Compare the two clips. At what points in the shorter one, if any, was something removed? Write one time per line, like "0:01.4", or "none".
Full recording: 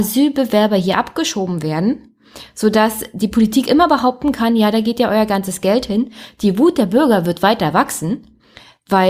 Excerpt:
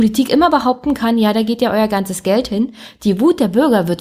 none

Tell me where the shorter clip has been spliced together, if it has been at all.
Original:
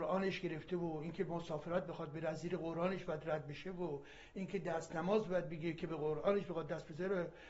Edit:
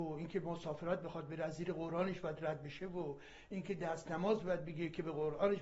none

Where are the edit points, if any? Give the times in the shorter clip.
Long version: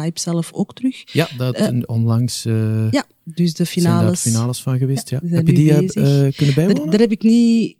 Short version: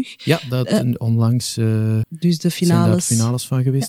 0:02.0

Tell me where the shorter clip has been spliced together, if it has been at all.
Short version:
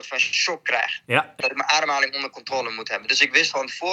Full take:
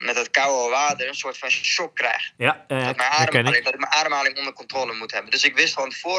0:01.4

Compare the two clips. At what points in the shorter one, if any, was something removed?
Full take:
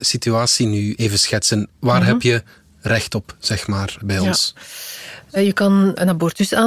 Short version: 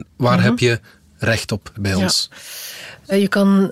0:01.7

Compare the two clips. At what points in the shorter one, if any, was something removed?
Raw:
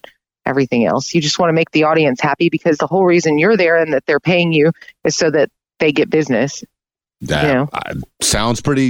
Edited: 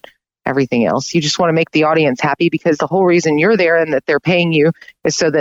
none

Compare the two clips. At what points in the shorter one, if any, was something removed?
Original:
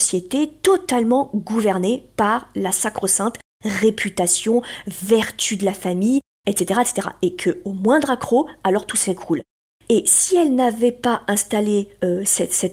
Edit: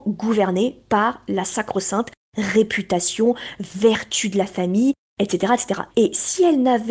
0:05.9

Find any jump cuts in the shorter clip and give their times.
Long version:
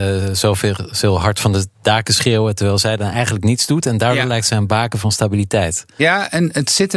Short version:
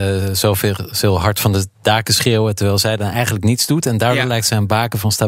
none

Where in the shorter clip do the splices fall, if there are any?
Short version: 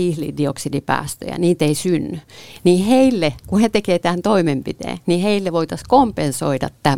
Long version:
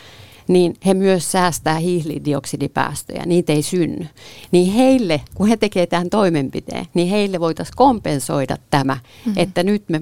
none

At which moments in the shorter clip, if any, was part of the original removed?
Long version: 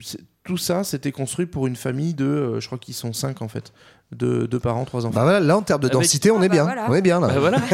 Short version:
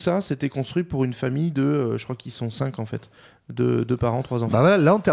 none

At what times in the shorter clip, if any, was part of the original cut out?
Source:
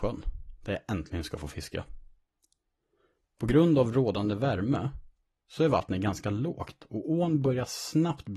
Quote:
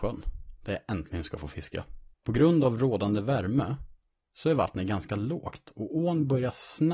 0:02.1

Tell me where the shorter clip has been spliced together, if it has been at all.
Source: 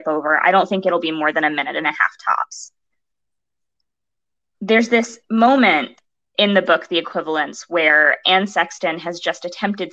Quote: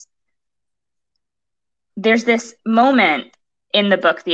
none

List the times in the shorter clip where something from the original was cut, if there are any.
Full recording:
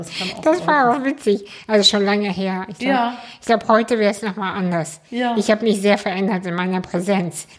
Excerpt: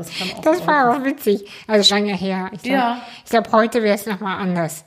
0:01.9

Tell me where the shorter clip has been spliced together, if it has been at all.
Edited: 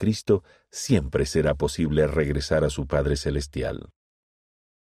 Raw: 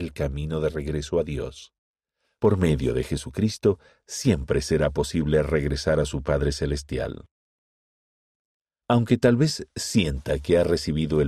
none

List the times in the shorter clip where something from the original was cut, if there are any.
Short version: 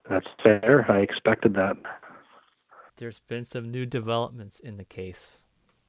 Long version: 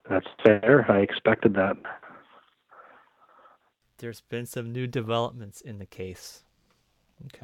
0:02.9

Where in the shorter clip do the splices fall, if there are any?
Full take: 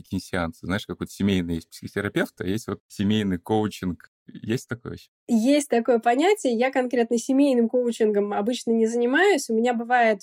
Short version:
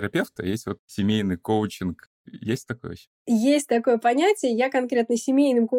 none

